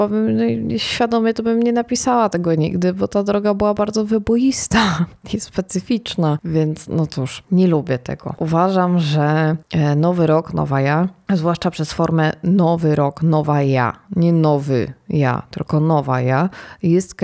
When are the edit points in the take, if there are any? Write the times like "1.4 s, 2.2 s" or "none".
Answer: none